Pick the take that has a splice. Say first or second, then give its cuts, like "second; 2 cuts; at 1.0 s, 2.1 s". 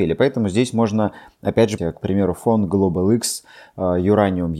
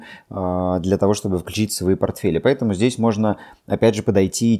first; 1 cut; at 1.8 s